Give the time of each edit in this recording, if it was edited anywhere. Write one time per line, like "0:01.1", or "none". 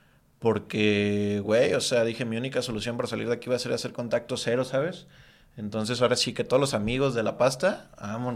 none